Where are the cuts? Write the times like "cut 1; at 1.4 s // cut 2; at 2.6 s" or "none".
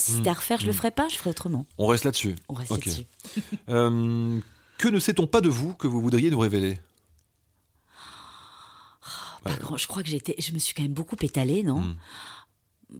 cut 1; at 1.7 s